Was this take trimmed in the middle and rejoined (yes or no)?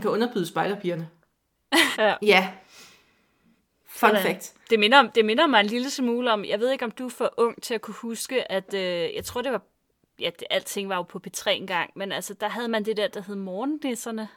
yes